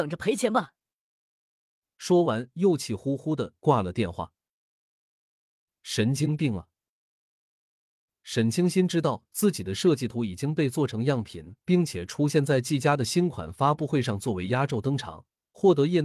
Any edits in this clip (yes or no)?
no